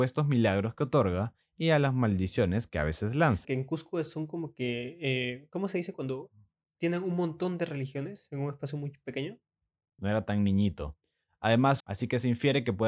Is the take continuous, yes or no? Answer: no